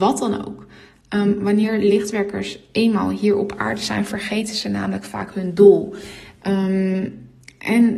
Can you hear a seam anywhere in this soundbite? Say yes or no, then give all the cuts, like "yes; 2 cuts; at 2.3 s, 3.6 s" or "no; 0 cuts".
no; 0 cuts